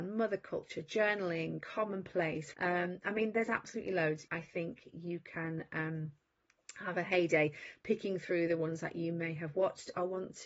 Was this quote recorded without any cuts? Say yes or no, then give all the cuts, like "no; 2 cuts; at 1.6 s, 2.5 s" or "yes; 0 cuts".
no; 2 cuts; at 2.5 s, 4.3 s